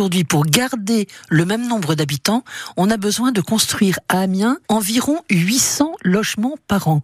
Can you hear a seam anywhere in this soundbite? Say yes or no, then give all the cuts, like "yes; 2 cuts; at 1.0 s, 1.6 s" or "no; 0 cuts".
yes; 1 cut; at 4.6 s